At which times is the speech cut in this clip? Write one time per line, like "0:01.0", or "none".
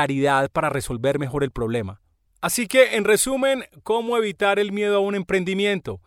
0:02.3